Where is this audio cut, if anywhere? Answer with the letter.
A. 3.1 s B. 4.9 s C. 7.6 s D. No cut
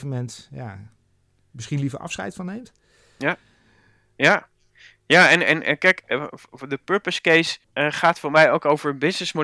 C